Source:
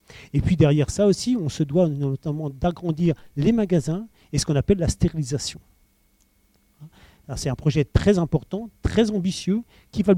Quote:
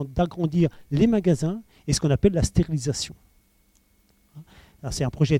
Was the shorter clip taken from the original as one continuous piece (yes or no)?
yes